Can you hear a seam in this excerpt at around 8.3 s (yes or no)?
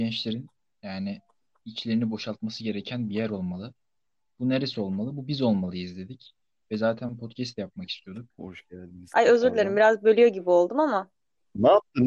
yes